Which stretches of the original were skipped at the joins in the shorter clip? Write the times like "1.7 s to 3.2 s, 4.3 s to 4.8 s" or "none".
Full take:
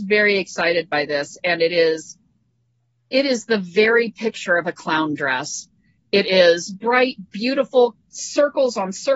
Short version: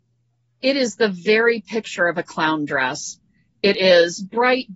none